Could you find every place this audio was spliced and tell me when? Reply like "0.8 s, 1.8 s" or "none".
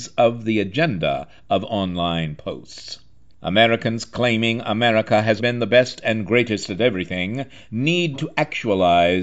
3.3 s, 5.4 s, 8.1 s